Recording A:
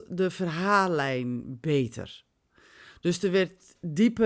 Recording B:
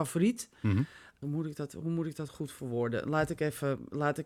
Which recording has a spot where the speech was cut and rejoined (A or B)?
B